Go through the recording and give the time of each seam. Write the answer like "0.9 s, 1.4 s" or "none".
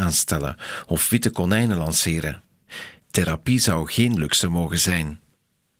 3.0 s